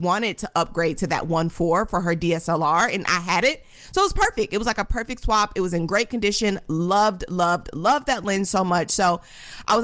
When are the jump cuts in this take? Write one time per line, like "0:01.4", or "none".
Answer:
none